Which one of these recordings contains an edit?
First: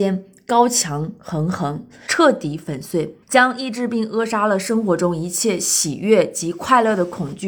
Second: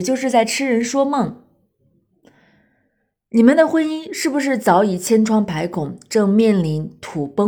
first; 2 cuts; at 2.1 s, 3.2 s

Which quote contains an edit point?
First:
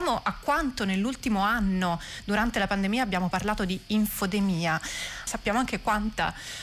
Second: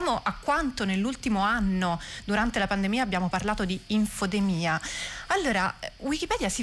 first; 1 cut; at 5.3 s

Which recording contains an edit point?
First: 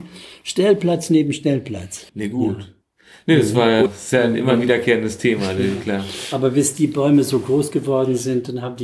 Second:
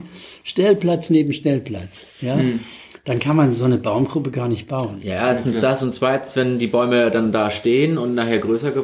first; 2 cuts; at 2.1 s, 3.9 s

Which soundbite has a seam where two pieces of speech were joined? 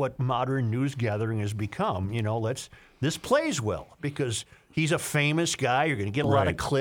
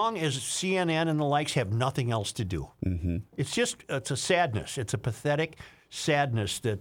second; 1 cut; at 3.3 s

